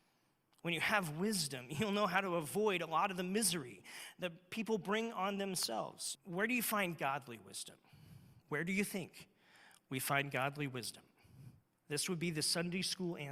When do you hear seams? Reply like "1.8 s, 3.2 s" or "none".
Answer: 6.1 s, 8.4 s